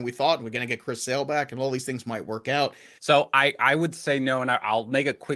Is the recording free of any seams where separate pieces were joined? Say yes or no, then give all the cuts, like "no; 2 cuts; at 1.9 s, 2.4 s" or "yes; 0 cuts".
no; 1 cut; at 3.0 s